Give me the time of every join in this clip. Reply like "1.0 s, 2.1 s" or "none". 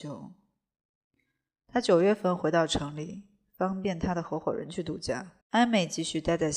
5.4 s